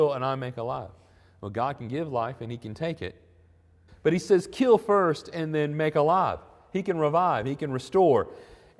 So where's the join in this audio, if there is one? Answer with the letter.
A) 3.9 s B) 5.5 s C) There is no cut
A